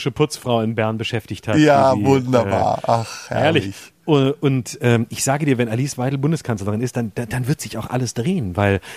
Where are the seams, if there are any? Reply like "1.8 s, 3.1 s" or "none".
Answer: none